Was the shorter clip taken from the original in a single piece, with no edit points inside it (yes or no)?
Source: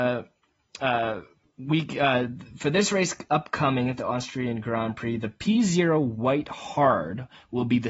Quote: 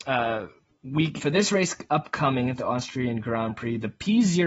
no